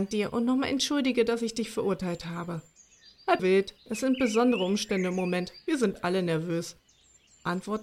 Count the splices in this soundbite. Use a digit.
1